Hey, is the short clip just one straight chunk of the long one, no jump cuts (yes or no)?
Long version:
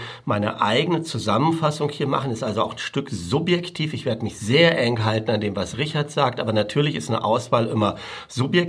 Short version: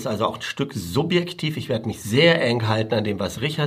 yes